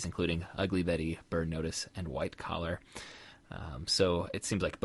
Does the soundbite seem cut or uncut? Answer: uncut